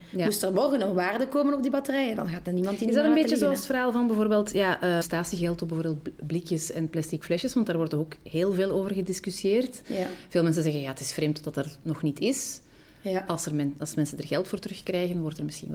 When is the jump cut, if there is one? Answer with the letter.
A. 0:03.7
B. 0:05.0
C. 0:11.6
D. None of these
B